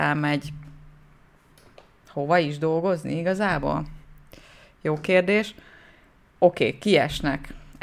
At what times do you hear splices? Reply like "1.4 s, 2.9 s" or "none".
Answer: none